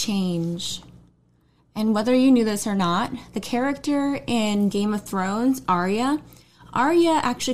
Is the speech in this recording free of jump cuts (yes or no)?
yes